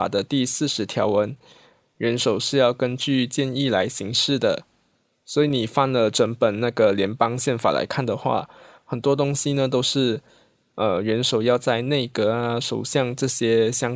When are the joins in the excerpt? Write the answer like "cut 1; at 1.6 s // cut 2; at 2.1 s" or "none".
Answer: none